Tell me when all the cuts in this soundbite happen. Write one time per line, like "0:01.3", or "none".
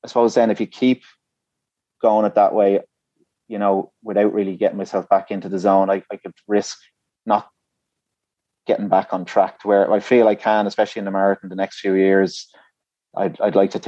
none